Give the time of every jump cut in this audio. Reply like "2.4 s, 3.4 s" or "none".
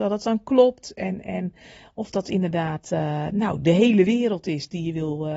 none